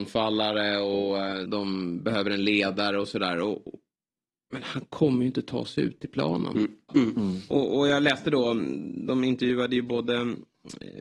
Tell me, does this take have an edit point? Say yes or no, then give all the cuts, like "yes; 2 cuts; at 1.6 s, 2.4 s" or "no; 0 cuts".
yes; 2 cuts; at 1.5 s, 6.9 s